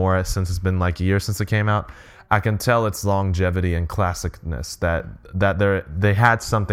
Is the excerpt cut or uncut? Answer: uncut